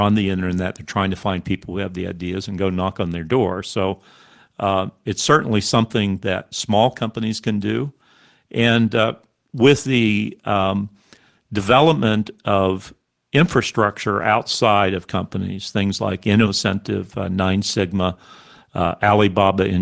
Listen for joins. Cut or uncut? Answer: uncut